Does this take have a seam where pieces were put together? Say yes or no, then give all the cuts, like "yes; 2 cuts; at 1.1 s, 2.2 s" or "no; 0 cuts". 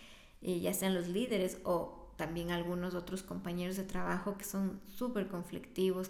no; 0 cuts